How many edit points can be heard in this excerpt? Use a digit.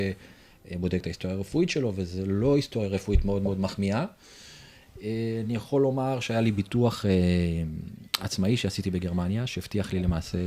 0